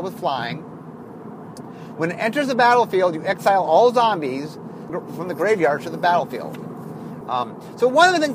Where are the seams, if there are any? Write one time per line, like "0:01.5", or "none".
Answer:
0:04.9
0:07.2